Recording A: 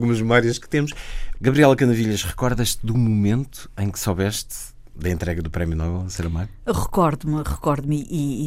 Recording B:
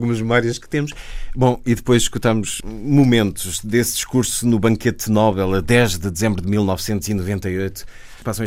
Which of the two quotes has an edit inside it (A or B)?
A